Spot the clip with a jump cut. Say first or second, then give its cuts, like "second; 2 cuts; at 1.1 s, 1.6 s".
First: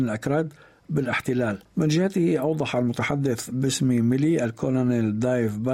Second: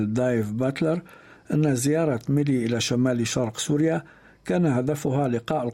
first; 1 cut; at 1.7 s